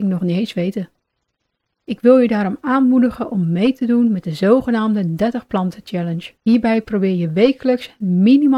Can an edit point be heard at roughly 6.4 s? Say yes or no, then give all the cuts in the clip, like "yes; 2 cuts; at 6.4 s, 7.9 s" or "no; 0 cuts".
yes; 1 cut; at 6.4 s